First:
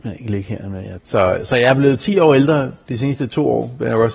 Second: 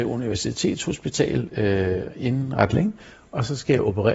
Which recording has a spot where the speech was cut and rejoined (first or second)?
first